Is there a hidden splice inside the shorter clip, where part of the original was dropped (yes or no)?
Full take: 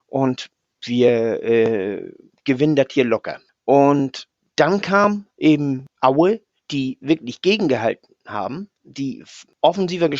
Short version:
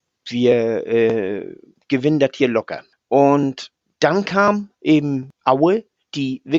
no